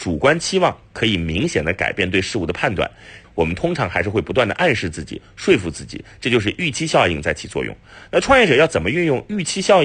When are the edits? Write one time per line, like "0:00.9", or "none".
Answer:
0:03.2